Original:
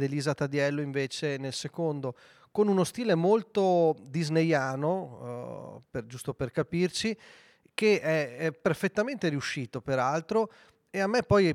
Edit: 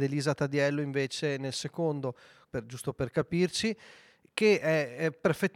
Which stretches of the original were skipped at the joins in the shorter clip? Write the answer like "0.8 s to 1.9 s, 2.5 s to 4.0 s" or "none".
2.4 s to 5.8 s